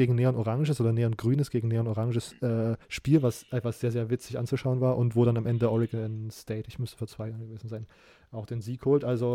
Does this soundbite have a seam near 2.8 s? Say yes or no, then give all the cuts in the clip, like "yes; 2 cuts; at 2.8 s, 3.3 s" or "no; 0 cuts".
yes; 1 cut; at 2.8 s